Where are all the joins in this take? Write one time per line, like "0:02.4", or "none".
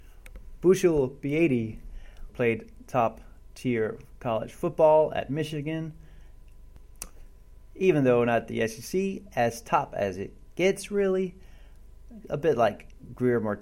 0:02.3